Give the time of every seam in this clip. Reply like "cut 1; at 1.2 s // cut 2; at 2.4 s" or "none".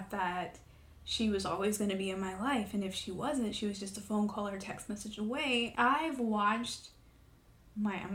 cut 1; at 5.7 s